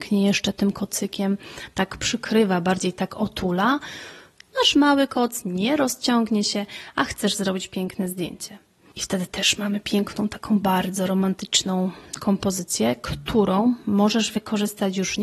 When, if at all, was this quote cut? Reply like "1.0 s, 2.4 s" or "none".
4.5 s, 8.9 s